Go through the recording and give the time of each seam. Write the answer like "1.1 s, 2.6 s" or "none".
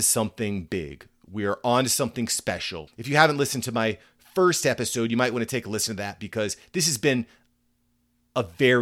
2.9 s